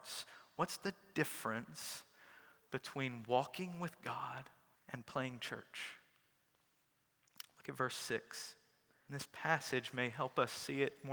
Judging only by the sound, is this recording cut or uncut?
cut